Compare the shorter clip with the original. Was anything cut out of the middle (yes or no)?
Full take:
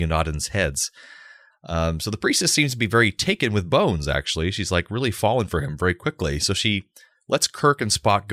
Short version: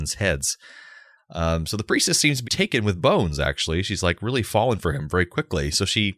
yes